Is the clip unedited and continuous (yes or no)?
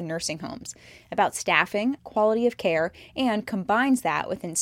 no